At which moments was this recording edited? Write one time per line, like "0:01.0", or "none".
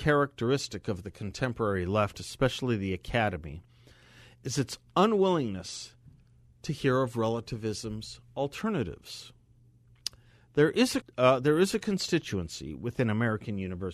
0:11.0